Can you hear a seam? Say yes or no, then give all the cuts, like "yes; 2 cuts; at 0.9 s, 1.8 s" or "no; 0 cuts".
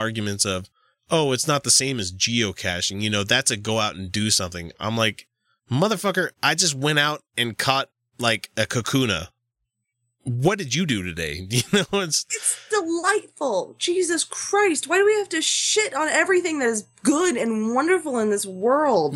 no; 0 cuts